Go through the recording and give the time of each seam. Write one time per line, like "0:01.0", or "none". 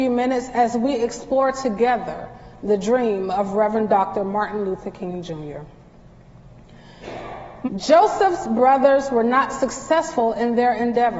0:07.7